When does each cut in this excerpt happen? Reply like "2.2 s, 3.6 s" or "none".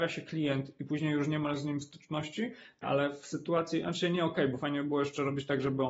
2.8 s